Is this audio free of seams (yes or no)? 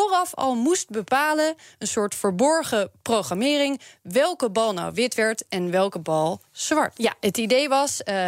no